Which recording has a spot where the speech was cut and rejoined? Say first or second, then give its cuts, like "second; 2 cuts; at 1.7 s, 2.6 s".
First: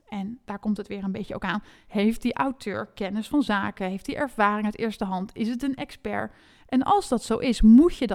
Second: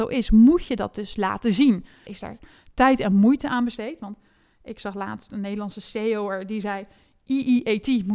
second; 1 cut; at 2.1 s